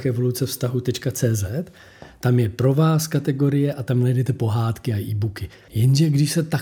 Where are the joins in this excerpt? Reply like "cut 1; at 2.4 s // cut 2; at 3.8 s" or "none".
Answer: cut 1; at 5.7 s